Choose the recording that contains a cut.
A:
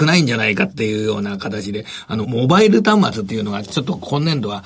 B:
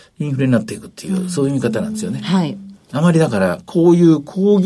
A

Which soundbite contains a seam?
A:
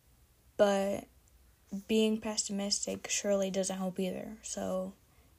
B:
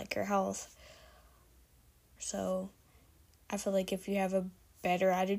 B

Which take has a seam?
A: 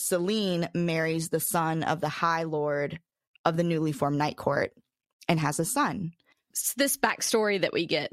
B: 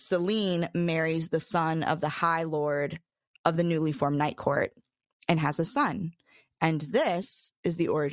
A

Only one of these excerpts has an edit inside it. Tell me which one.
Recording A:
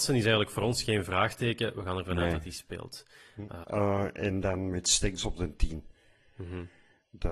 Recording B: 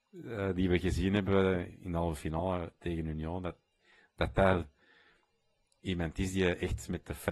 A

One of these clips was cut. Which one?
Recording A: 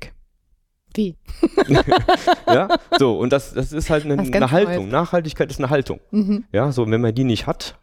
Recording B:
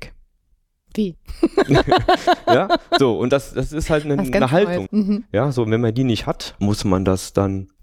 B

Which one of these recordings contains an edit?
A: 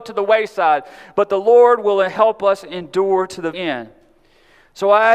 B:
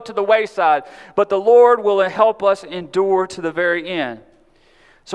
A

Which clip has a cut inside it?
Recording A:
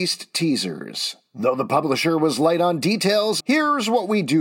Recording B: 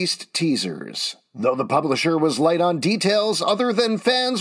A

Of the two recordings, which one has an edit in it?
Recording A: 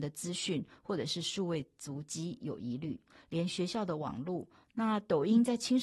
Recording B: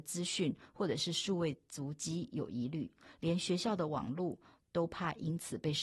A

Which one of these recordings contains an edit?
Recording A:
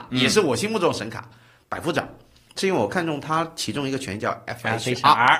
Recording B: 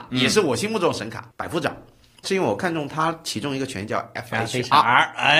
B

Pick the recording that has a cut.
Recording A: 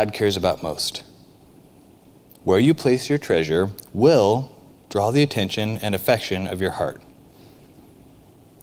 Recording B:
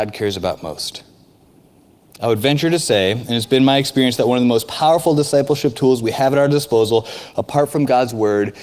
B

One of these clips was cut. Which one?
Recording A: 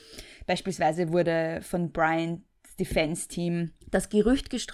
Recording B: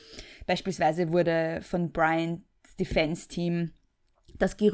A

